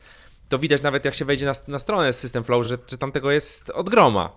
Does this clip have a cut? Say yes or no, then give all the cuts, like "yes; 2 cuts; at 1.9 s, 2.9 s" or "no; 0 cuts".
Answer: no; 0 cuts